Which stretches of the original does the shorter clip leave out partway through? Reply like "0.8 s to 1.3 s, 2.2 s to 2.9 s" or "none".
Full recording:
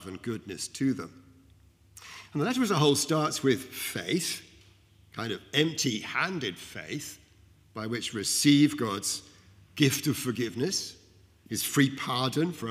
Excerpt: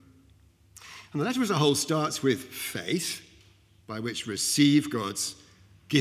5.0 s to 7.7 s